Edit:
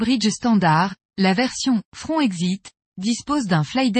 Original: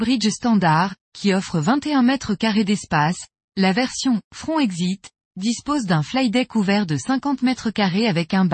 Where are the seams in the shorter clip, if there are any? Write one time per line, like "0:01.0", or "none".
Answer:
0:01.0

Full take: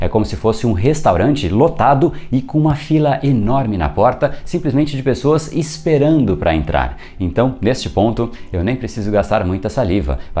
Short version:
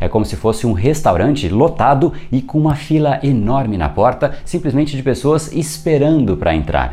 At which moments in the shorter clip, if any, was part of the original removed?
none

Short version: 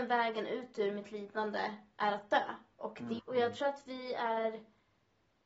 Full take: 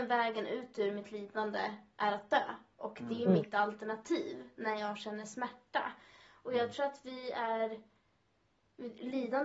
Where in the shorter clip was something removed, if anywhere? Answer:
0:03.2

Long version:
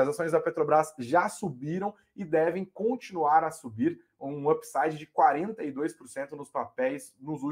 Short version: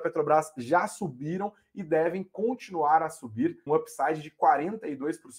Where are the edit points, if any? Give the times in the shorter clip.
0:03.7

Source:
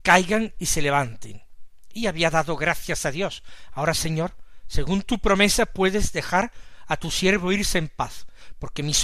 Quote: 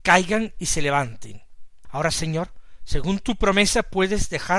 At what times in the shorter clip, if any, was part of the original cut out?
0:01.8

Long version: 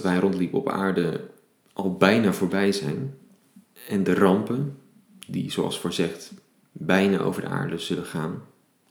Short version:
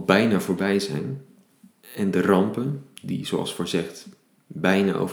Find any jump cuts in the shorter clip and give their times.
0:03.0

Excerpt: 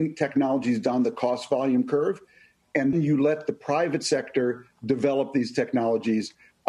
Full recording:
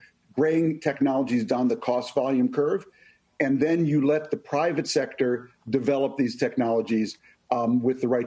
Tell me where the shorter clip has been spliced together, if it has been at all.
0:02.9

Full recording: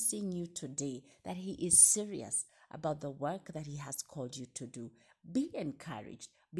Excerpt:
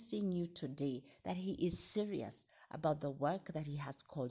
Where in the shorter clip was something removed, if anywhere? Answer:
none

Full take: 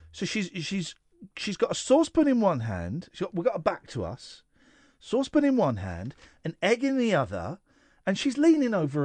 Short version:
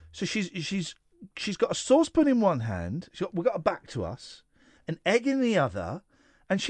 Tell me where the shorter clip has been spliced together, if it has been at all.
0:04.8

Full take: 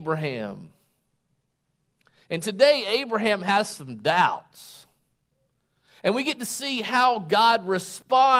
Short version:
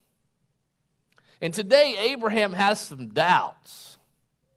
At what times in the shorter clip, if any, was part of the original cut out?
none

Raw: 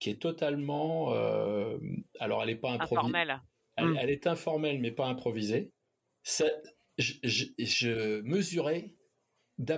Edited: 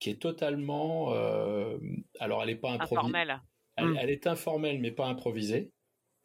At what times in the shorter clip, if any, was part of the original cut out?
none

